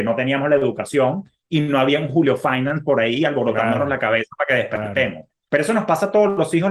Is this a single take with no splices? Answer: no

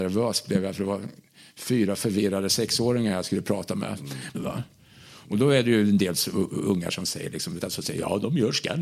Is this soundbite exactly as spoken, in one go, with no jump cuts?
no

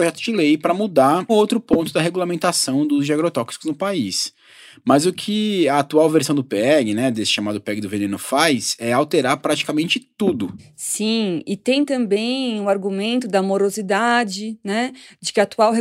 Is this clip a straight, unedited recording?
no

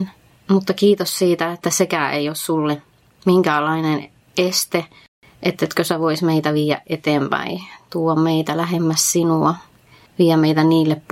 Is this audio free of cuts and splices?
yes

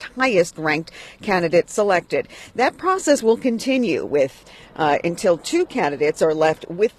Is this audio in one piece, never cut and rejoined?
yes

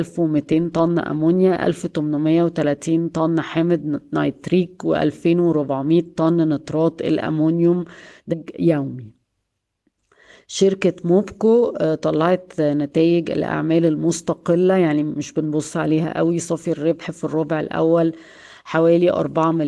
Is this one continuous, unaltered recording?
no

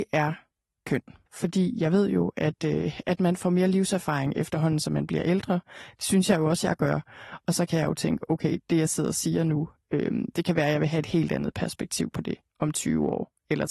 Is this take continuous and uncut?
no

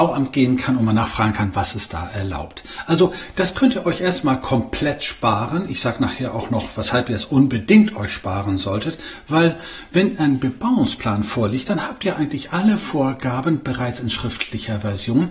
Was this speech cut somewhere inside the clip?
no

